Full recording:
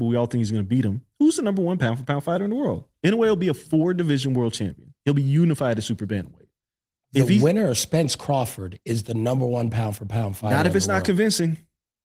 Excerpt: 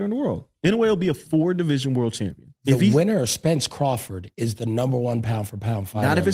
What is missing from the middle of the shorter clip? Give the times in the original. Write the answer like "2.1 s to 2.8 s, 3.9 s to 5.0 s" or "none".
5.0 s to 7.1 s